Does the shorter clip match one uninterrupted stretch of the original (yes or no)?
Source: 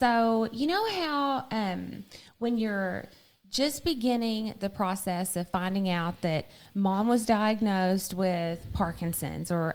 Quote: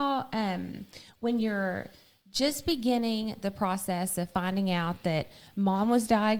yes